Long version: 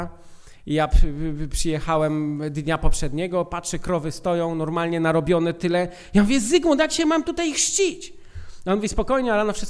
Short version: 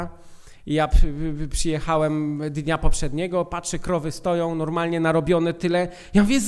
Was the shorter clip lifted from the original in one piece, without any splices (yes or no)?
yes